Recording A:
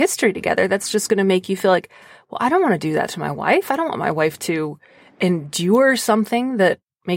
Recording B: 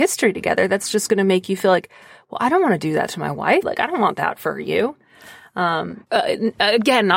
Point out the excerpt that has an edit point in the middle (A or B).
B